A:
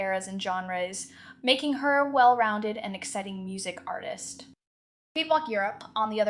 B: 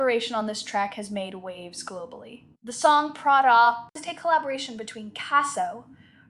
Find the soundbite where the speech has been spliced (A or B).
B